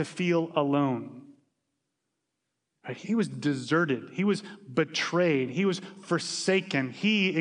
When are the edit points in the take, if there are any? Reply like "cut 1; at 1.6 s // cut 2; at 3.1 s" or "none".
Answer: cut 1; at 3.0 s

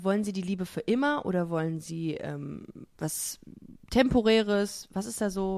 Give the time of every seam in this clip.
none

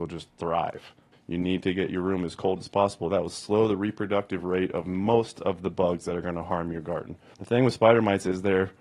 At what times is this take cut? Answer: cut 1; at 1.1 s // cut 2; at 7.3 s

